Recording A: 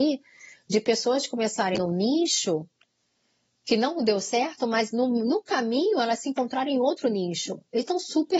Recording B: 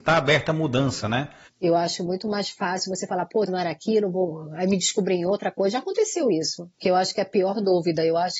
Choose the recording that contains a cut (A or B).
B